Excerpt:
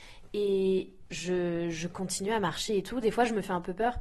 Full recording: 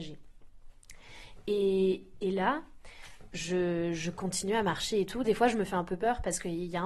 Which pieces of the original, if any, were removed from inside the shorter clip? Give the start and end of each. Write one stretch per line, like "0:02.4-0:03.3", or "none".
0:02.2-0:03.3